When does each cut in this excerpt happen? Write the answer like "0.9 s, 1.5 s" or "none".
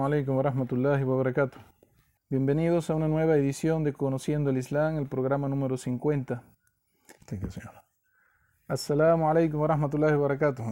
2.2 s, 7.2 s